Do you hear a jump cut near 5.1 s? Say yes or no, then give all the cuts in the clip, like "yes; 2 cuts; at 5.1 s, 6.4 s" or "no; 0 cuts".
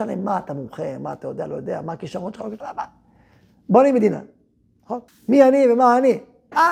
yes; 2 cuts; at 2.6 s, 5.1 s